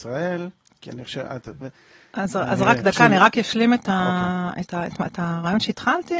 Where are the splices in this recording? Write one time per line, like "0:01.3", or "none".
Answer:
0:01.6